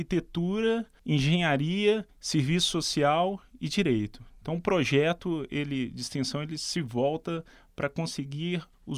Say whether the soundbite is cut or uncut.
uncut